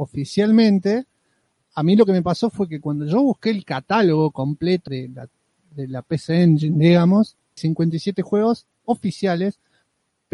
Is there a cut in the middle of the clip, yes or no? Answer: yes